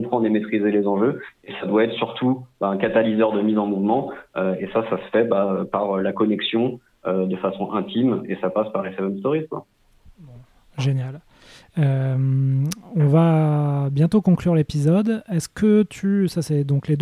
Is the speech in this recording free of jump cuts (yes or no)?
yes